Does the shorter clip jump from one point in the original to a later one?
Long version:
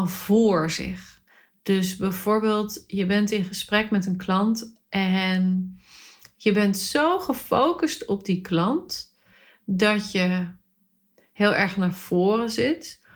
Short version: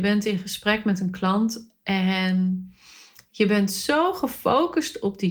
no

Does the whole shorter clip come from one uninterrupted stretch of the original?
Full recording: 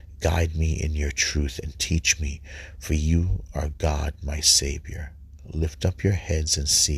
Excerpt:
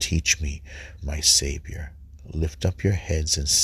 no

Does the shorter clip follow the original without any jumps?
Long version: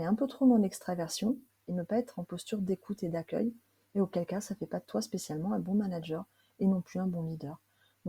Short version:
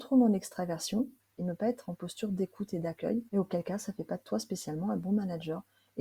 no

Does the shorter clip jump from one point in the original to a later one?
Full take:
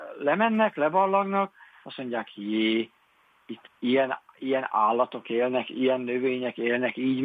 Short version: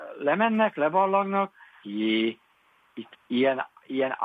yes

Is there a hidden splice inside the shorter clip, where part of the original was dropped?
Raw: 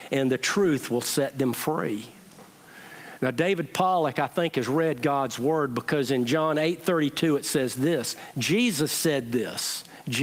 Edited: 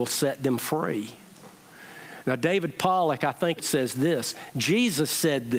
yes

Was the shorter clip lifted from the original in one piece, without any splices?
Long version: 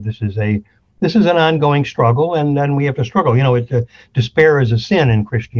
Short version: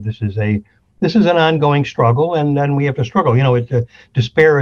yes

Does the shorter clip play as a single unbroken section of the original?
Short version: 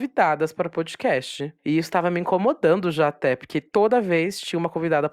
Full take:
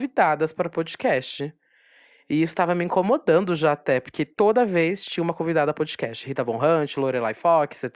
no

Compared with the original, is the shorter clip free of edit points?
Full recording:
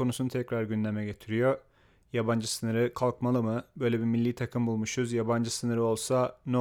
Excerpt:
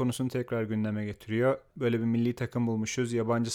no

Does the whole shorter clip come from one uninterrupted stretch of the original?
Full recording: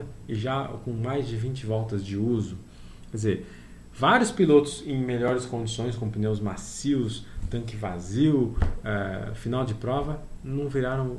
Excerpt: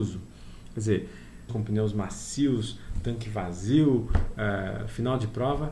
no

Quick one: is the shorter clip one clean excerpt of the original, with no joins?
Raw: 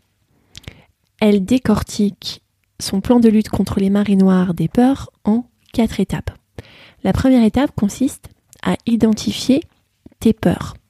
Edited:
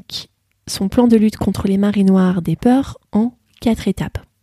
yes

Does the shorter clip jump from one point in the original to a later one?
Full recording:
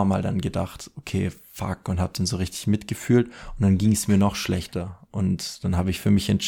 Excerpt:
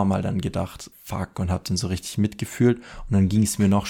yes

